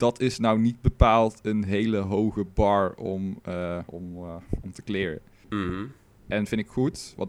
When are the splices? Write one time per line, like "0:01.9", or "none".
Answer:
0:03.9
0:05.4